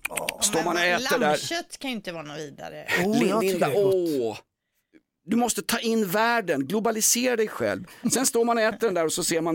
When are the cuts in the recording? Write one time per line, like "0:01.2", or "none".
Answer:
none